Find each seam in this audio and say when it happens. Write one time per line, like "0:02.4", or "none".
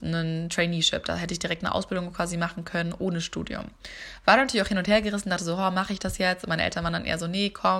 none